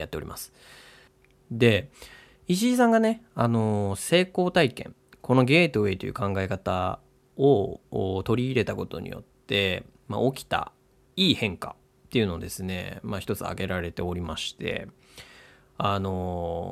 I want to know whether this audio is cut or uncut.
uncut